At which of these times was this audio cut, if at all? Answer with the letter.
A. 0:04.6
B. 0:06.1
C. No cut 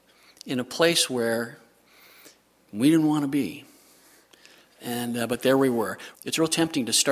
B